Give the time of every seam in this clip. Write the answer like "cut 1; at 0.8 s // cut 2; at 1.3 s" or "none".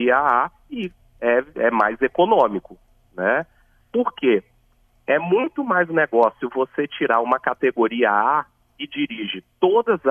cut 1; at 3.8 s